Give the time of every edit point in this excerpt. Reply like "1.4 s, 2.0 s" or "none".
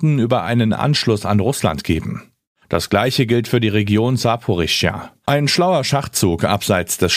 2.6 s, 5.3 s